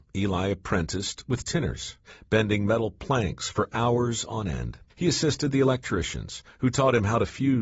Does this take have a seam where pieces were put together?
yes; 1 cut; at 4.9 s

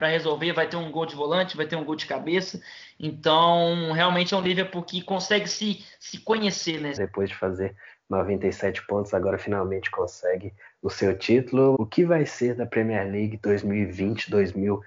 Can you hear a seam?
yes; 2 cuts; at 7.0 s, 11.7 s

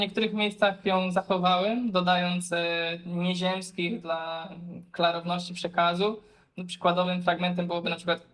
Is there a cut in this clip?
no; 0 cuts

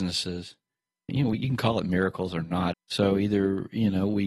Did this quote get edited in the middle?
yes; 2 cuts; at 1.1 s, 2.7 s

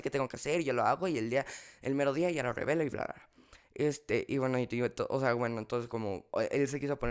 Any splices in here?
no; 0 cuts

